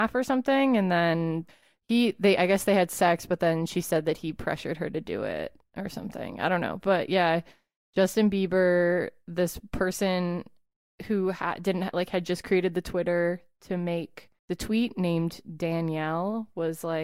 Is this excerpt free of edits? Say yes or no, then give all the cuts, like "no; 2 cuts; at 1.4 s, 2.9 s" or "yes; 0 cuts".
no; 1 cut; at 14.4 s